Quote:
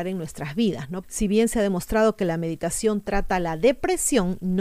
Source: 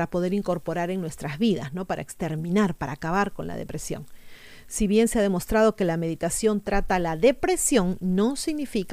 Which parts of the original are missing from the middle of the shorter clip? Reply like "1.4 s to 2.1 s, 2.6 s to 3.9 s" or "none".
1.9 s to 4.6 s